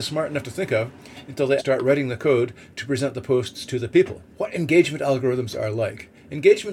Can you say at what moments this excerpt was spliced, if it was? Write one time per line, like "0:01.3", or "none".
0:01.6
0:04.3